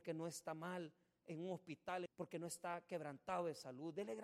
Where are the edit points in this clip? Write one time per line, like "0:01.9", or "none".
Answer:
0:02.1